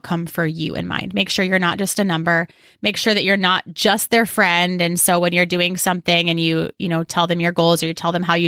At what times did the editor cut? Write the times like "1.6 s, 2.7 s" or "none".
none

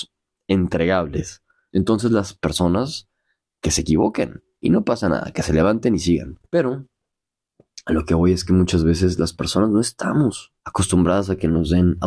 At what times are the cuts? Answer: 1.7 s, 6.5 s, 10.6 s

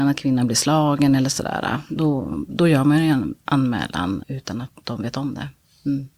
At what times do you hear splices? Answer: 4.2 s

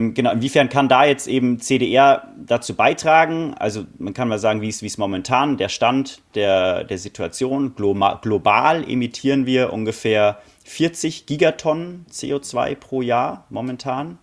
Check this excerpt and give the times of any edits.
none

